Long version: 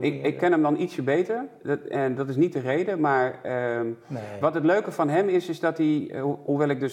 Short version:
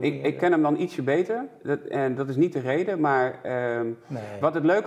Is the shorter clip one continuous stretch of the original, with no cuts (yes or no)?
yes